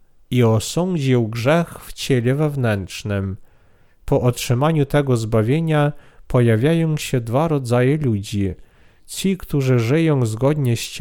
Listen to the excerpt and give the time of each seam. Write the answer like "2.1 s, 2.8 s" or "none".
4.0 s